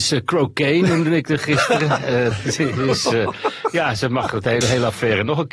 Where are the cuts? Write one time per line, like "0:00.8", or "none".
0:02.3
0:04.6